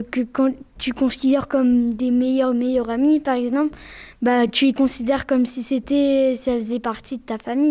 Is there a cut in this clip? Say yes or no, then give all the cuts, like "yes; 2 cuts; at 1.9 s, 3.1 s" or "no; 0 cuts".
no; 0 cuts